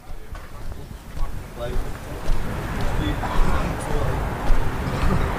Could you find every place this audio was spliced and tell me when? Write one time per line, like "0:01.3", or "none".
none